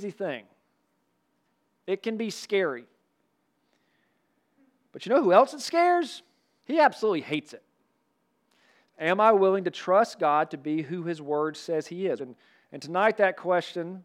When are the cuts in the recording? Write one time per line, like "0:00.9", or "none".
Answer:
0:06.6
0:08.9
0:12.2

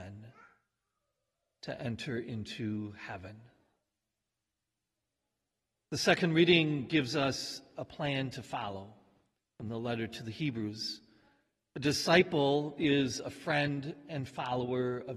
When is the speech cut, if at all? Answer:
none

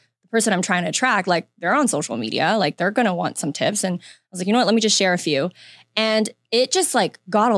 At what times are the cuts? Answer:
none

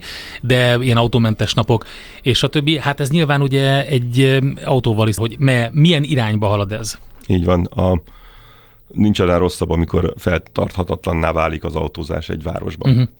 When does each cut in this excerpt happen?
0:05.2

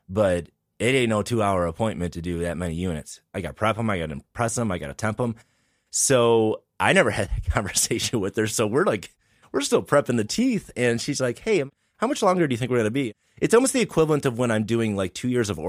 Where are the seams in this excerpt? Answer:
none

